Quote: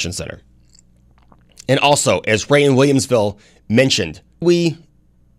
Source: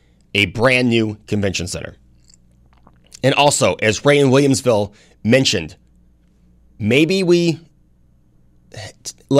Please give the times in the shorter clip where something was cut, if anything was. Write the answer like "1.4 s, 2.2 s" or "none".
4.4 s